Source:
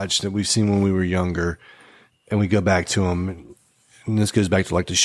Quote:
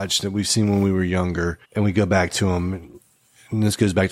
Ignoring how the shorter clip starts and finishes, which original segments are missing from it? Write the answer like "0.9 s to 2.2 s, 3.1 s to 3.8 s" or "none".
1.6 s to 2.2 s